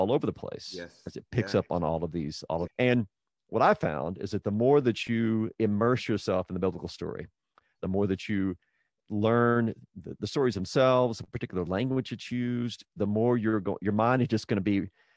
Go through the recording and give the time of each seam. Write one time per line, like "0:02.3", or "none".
0:02.7